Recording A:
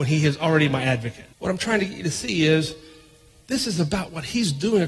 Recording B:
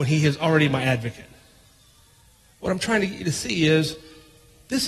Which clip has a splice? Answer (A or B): A